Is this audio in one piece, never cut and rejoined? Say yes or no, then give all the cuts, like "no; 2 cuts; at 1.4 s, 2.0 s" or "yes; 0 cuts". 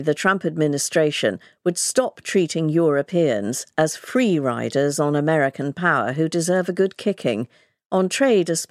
yes; 0 cuts